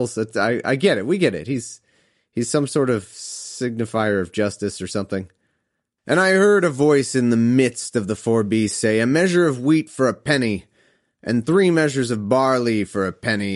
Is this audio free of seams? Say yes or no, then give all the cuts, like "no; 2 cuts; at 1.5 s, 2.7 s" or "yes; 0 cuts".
yes; 0 cuts